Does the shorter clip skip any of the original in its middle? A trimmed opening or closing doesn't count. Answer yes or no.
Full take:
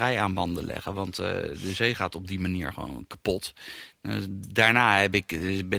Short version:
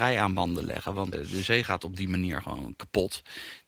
yes